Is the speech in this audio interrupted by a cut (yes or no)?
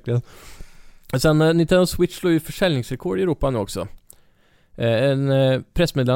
no